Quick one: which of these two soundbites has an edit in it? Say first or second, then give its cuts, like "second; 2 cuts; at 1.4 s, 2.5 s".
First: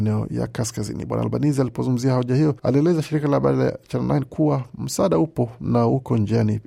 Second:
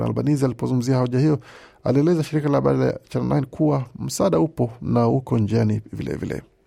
first; 1 cut; at 2.6 s